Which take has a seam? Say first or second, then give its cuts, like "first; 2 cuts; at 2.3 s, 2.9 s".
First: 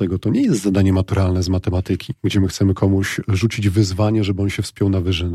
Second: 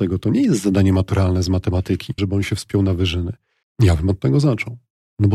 second; 2 cuts; at 2.2 s, 3.6 s